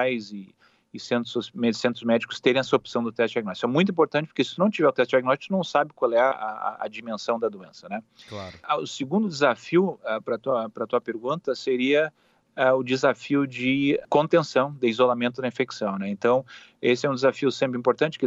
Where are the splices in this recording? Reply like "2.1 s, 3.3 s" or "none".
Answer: none